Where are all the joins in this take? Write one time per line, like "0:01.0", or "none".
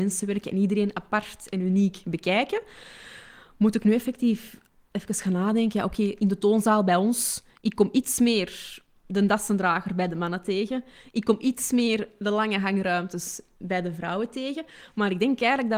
none